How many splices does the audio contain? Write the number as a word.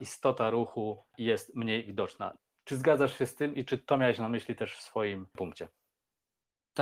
zero